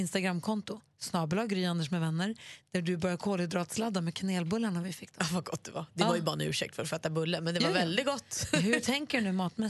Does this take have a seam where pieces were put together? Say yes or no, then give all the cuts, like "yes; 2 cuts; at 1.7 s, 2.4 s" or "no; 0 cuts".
no; 0 cuts